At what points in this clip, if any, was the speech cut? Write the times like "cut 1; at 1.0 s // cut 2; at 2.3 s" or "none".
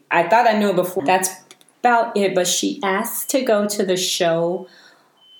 cut 1; at 1.0 s